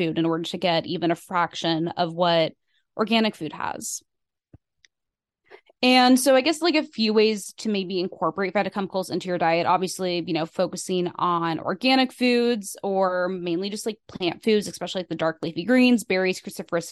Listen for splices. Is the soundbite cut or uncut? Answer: uncut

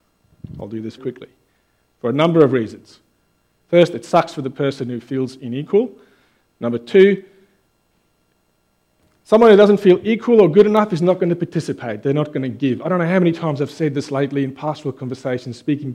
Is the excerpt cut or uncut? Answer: cut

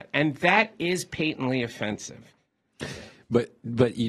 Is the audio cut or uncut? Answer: uncut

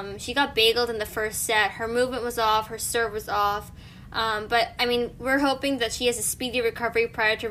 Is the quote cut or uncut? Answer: uncut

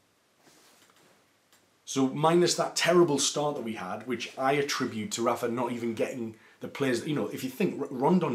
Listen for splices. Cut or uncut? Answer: uncut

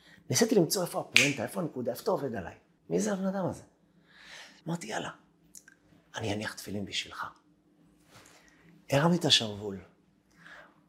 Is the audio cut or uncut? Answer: cut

